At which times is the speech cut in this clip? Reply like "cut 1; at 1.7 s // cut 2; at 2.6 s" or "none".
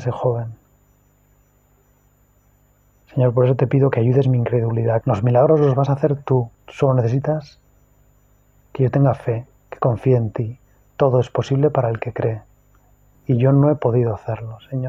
cut 1; at 5.0 s // cut 2; at 13.1 s

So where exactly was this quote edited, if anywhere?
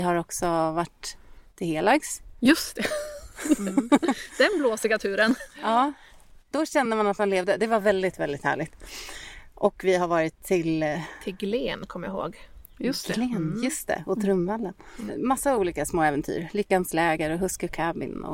none

